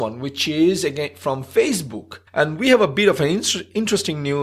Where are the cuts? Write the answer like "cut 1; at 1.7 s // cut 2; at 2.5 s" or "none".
cut 1; at 2.3 s